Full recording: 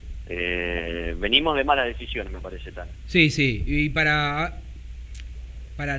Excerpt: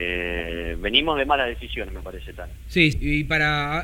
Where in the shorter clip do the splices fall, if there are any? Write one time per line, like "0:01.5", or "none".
0:02.9